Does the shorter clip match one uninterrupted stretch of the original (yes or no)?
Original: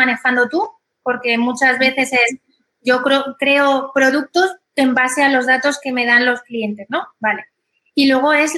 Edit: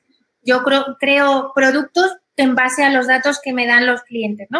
yes